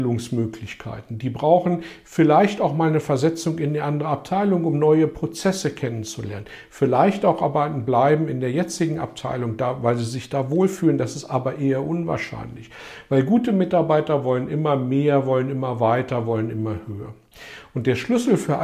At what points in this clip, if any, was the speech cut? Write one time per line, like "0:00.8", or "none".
none